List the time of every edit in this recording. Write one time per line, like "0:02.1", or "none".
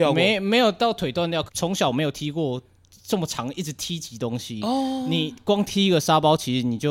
0:01.5